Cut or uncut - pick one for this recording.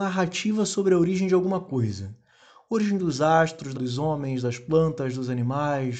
cut